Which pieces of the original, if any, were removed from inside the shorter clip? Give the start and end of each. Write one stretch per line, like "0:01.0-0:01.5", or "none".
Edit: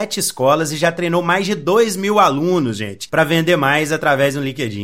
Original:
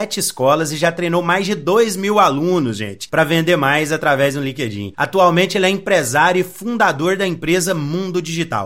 none